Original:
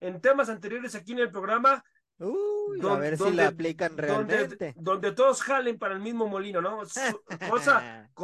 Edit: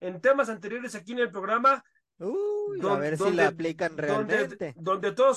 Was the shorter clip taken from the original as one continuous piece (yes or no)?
yes